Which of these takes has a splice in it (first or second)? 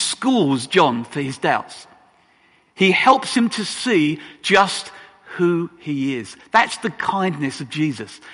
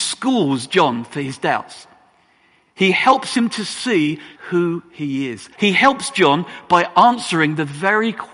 second